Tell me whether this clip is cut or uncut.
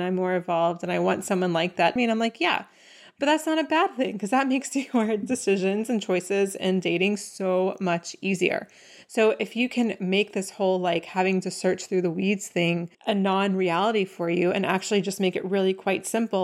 cut